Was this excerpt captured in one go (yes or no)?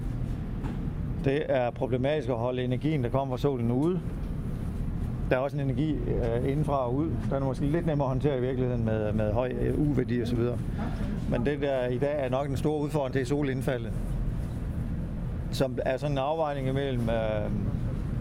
no